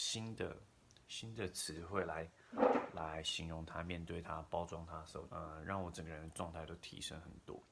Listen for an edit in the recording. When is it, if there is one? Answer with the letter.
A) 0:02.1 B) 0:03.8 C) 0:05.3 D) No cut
C